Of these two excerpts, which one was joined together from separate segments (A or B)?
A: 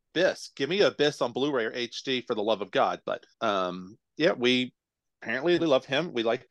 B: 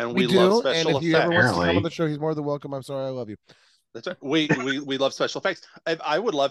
A